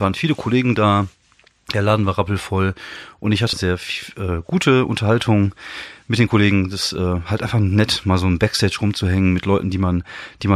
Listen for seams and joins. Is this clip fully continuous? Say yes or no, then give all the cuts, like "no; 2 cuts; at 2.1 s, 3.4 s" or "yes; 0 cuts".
no; 1 cut; at 3.5 s